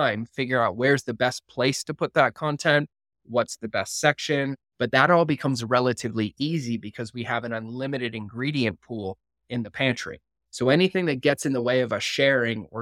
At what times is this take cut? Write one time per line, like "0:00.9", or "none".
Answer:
0:04.6
0:10.4